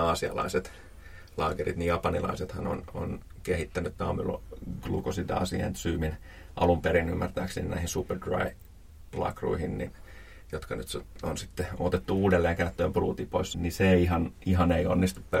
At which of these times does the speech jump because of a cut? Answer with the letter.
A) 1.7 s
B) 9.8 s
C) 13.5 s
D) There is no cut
C